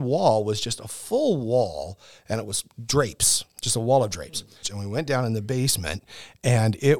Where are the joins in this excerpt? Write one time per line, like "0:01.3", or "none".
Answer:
0:04.6